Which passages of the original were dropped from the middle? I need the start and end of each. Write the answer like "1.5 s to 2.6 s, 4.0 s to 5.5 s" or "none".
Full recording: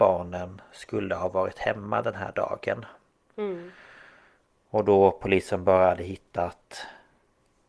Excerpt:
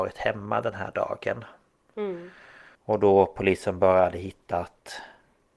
4.2 s to 4.6 s